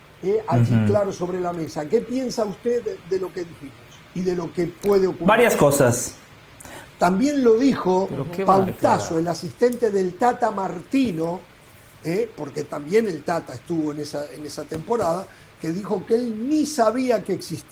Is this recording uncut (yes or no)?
no